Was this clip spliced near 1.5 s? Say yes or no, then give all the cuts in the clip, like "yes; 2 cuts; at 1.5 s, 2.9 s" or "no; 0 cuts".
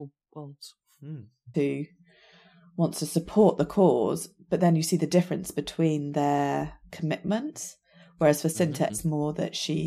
yes; 2 cuts; at 1.5 s, 8.9 s